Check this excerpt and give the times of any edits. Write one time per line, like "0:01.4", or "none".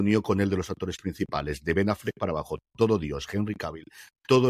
none